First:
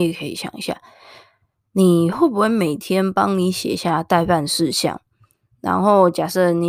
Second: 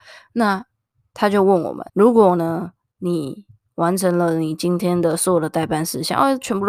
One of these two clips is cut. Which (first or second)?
second